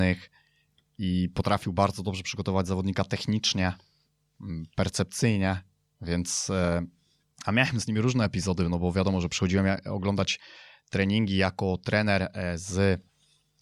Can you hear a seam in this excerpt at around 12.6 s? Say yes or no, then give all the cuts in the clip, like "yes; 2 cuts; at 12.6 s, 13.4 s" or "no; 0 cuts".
no; 0 cuts